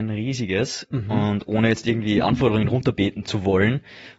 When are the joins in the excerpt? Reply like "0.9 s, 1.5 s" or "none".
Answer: none

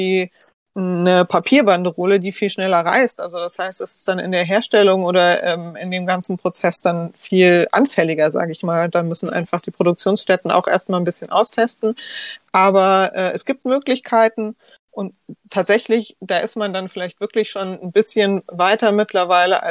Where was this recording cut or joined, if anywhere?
none

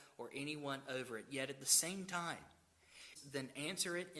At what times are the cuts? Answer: 3.2 s

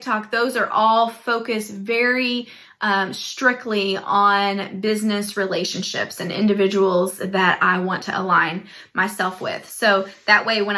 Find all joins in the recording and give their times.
none

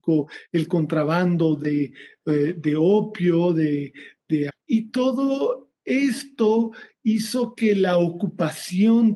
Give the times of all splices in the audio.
4.5 s, 5.8 s

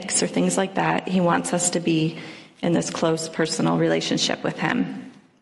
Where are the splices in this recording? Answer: none

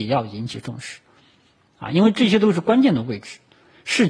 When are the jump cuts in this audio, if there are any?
none

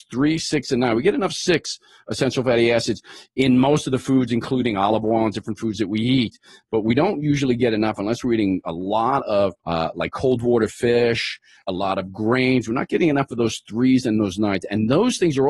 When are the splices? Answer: 9.6 s, 11.6 s

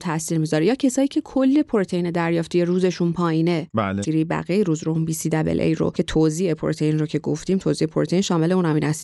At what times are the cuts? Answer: 4.0 s

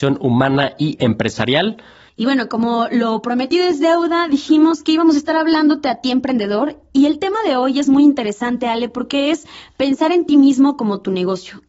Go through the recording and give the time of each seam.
2.1 s

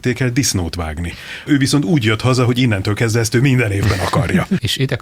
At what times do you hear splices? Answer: 1.5 s

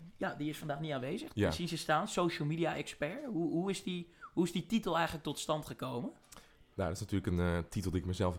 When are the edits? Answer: 1.4 s

